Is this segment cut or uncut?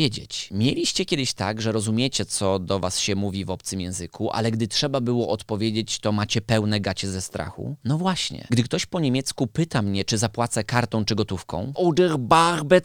cut